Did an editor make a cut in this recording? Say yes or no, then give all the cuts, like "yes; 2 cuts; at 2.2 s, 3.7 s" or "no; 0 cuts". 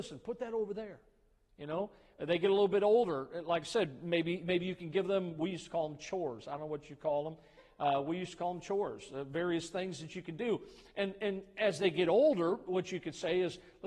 no; 0 cuts